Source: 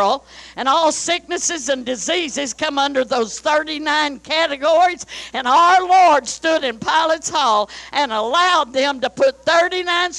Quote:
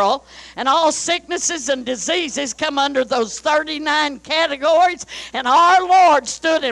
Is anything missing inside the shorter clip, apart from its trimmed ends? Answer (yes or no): no